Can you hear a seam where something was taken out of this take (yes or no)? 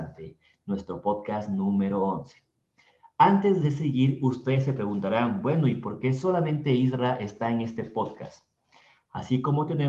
no